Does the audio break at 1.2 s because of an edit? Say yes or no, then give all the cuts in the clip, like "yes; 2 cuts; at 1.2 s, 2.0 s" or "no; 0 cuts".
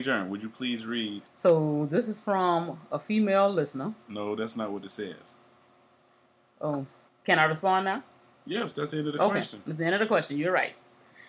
yes; 2 cuts; at 1.2 s, 7.1 s